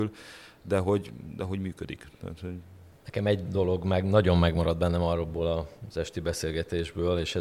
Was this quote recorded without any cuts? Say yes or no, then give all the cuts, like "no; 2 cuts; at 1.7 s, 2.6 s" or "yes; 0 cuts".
yes; 0 cuts